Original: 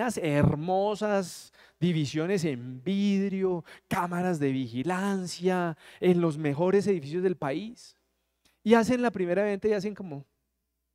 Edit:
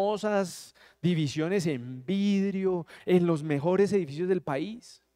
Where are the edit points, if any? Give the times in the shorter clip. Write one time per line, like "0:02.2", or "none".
0:03.0